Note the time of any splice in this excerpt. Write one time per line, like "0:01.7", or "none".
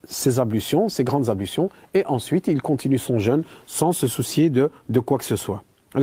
none